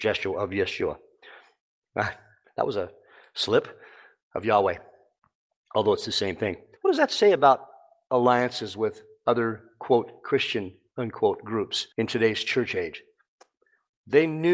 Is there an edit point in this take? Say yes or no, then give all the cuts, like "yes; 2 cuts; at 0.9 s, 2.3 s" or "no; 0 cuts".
yes; 2 cuts; at 6.8 s, 11.9 s